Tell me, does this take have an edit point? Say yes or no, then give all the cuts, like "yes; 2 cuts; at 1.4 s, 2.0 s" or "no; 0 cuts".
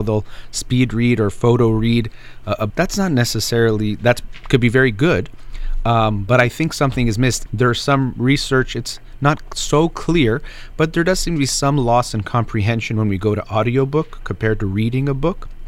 yes; 2 cuts; at 2.7 s, 7.5 s